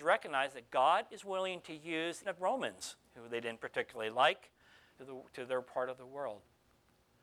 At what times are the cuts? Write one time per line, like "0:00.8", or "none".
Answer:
0:02.2
0:05.0

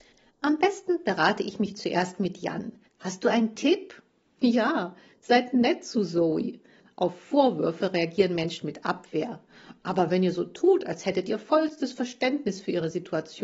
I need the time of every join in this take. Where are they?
0:02.8

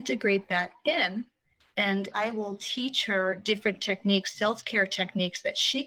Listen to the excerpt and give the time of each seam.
0:02.1

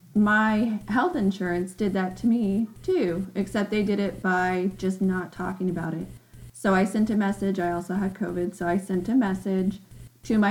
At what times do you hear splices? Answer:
none

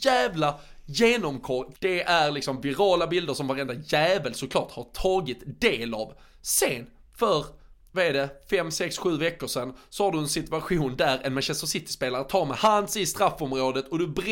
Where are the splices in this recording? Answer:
0:01.7

